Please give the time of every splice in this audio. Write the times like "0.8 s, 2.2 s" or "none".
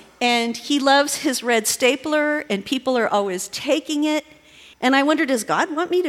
4.7 s